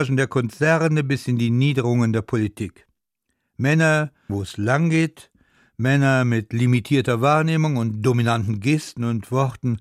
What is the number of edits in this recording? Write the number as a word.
one